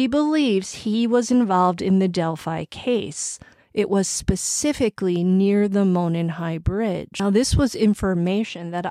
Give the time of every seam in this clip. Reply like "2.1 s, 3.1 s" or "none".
3.6 s